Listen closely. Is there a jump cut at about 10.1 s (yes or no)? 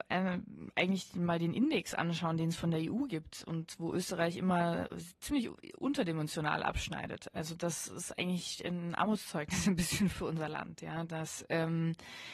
yes